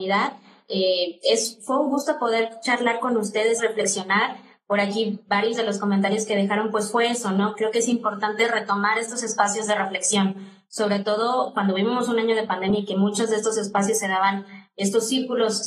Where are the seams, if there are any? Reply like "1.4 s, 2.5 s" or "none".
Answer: 3.6 s